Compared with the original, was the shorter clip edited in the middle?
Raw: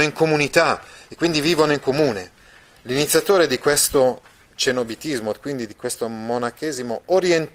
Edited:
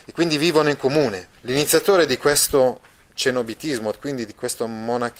yes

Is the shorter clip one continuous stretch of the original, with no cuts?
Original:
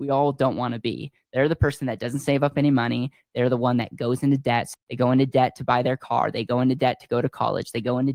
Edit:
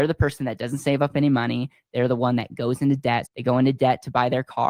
no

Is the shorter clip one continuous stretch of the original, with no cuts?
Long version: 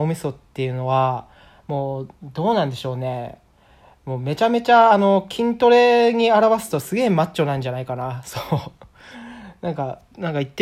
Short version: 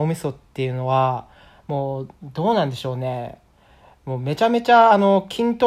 yes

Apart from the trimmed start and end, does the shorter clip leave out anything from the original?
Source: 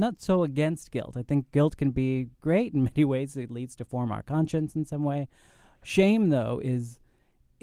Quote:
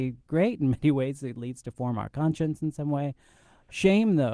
no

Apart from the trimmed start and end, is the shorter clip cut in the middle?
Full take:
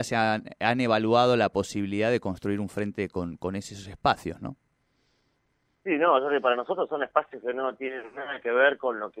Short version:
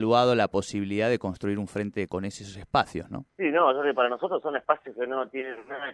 yes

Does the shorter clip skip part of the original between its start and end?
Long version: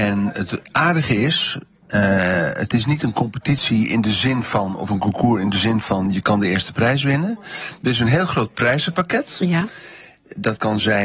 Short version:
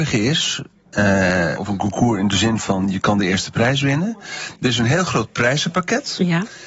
yes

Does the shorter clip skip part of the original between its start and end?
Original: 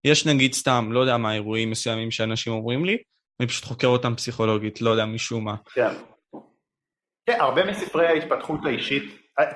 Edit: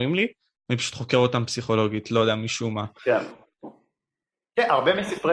no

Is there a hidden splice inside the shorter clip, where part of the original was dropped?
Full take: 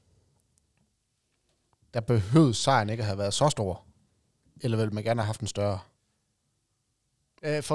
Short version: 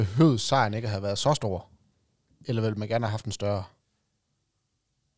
no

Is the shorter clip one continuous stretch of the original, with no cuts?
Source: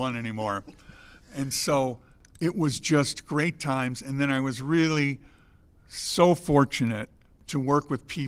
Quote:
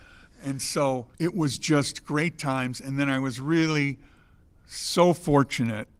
no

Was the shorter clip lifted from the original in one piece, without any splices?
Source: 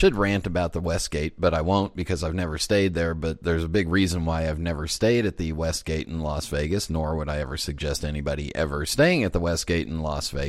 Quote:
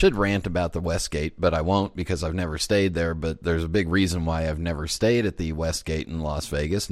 yes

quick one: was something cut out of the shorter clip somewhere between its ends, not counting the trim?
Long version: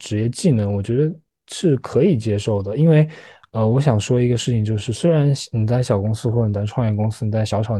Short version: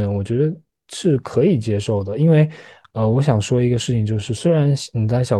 no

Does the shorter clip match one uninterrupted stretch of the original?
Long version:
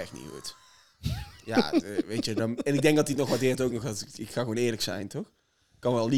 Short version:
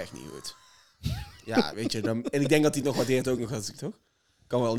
no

